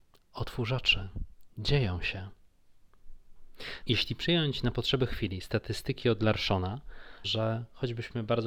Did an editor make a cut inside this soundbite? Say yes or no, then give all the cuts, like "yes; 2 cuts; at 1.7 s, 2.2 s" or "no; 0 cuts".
yes; 2 cuts; at 3.8 s, 7.2 s